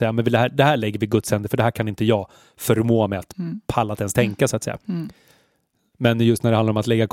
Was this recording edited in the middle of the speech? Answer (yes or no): no